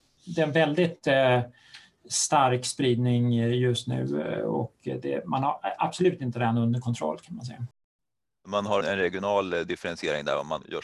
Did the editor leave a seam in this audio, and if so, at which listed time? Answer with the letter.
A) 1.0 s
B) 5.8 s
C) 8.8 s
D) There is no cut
C